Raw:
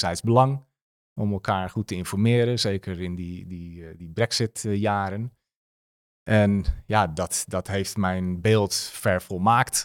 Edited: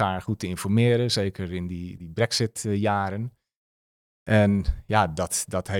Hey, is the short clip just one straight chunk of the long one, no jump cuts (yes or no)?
no